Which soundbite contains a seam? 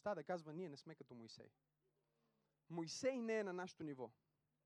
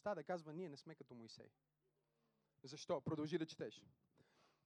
second; 1 cut; at 2.6 s

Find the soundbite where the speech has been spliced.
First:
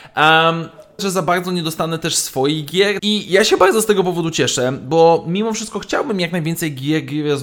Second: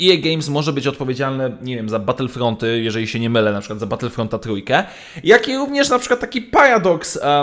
first; 2 cuts; at 1.0 s, 3.0 s

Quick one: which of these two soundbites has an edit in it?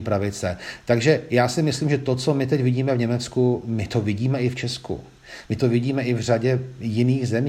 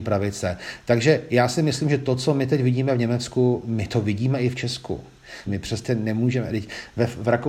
second; 1 cut; at 5.5 s

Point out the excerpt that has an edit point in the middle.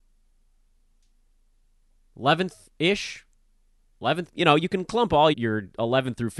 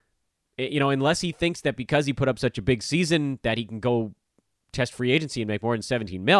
first; 2 cuts; at 4.3 s, 5.3 s

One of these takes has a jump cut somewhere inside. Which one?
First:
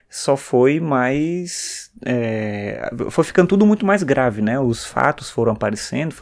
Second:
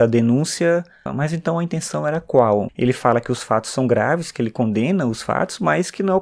second; 2 cuts; at 1.1 s, 2.7 s

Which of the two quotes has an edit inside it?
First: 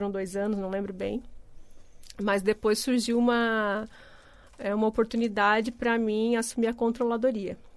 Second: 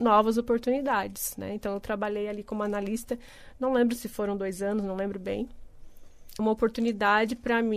second; 1 cut; at 6.4 s

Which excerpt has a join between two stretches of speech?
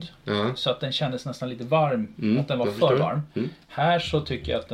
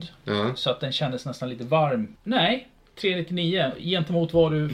second; 1 cut; at 2.1 s

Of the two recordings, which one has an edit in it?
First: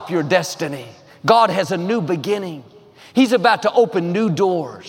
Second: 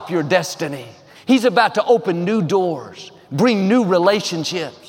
second; 1 cut; at 1.1 s

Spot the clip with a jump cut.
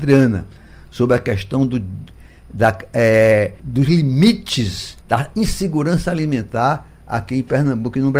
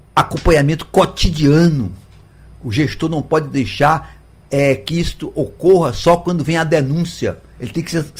first; 2 cuts; at 3.6 s, 5.0 s

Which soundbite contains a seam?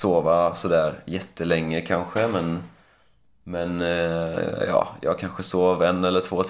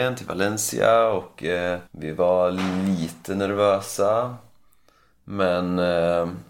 second; 1 cut; at 1.9 s

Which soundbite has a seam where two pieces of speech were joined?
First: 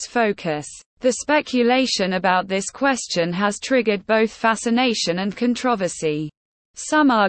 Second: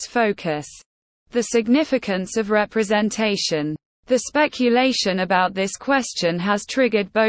first; 1 cut; at 0.9 s

